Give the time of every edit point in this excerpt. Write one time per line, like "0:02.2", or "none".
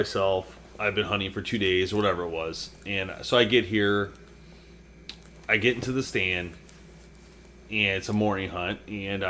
none